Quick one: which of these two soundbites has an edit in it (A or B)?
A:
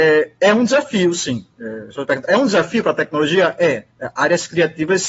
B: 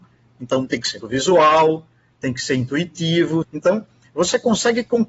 B